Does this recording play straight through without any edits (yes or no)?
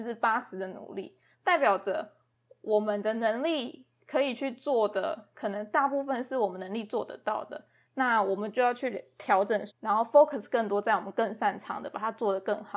no